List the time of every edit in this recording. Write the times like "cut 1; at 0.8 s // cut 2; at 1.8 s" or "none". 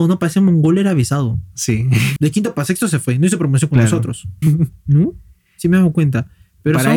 cut 1; at 2.2 s // cut 2; at 4.4 s